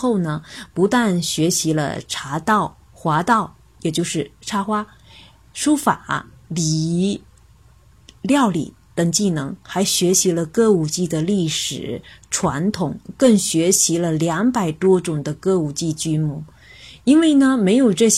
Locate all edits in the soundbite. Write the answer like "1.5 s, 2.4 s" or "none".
2.8 s